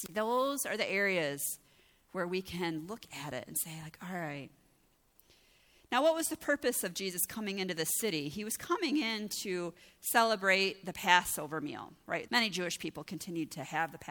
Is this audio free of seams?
no; 1 cut; at 12.3 s

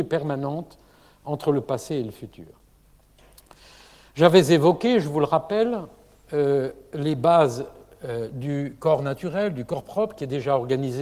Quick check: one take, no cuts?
yes; 0 cuts

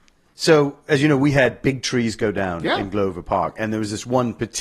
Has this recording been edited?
no; 0 cuts

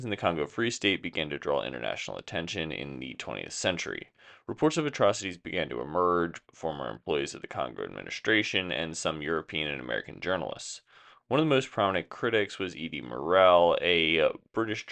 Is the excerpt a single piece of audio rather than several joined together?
no; 1 cut; at 6.5 s

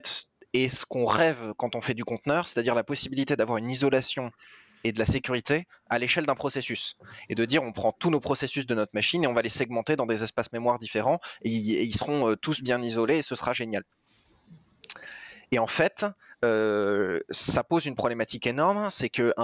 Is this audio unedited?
yes; 0 cuts

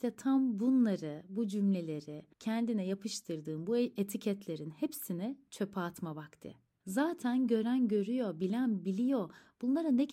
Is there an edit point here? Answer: yes; 2 cuts; at 2.3 s, 6.8 s

